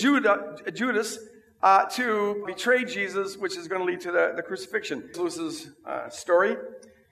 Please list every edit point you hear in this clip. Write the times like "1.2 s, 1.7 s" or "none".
2.5 s, 5.1 s